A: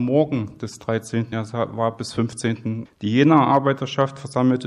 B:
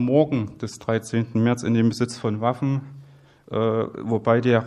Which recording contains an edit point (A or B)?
A